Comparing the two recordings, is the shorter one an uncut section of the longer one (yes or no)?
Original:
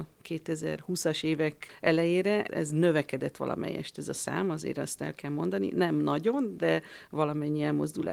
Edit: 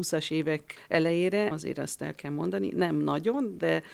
no